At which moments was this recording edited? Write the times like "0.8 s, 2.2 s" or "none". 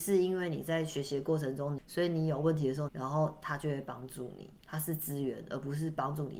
1.8 s, 2.9 s, 4.6 s